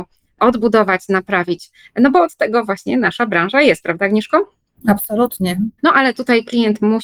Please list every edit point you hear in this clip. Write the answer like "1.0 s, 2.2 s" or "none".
5.8 s